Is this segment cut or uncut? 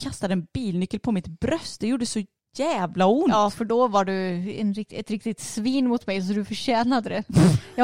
uncut